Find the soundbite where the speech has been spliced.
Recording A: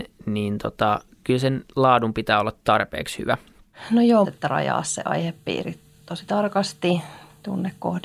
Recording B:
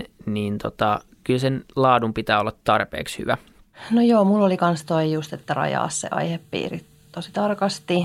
A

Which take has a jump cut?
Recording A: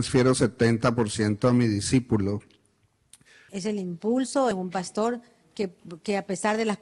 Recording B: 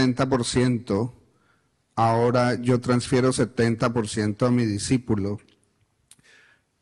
A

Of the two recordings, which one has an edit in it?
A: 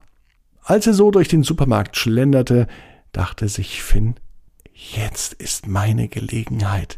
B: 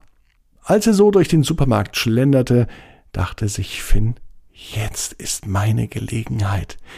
B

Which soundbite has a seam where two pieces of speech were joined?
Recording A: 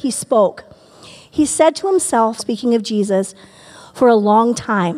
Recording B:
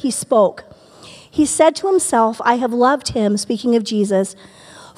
A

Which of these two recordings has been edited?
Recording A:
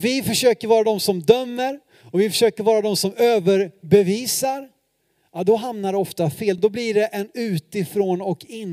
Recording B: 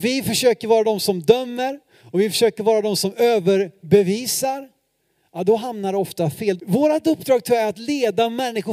B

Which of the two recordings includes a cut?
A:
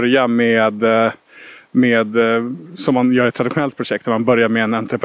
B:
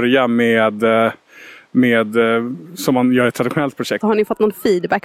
B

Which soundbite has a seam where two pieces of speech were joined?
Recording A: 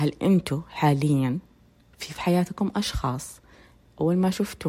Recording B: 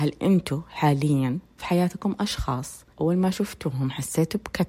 B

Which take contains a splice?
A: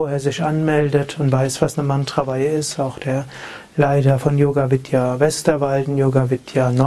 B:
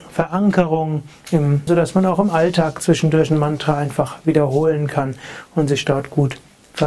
B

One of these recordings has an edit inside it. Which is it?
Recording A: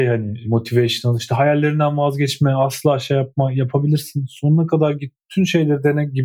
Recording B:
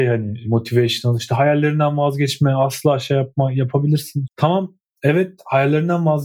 B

